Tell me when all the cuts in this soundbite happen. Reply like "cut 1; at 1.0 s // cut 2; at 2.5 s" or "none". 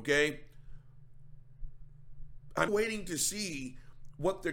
cut 1; at 2.7 s